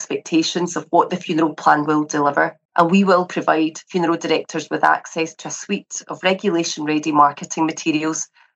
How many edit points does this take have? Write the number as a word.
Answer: one